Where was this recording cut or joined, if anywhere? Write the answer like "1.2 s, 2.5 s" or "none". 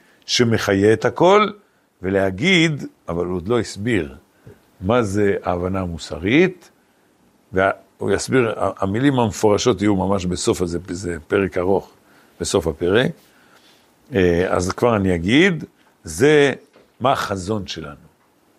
none